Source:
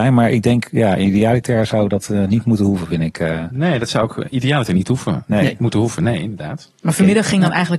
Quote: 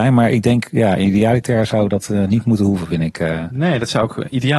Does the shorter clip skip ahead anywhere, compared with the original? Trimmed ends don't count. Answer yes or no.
no